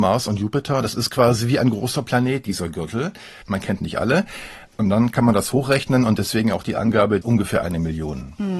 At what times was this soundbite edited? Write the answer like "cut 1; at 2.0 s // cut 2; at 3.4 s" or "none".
cut 1; at 3.4 s // cut 2; at 7.2 s